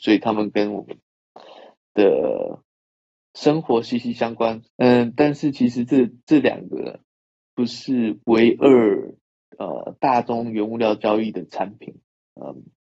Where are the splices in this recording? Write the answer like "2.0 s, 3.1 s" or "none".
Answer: 4.6 s